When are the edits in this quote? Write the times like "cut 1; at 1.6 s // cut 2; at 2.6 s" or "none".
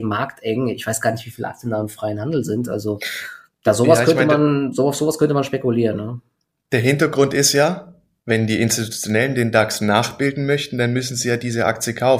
none